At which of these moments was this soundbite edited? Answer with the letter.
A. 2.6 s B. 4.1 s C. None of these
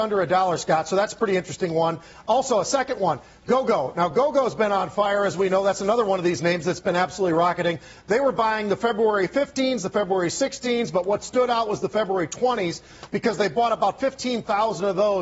C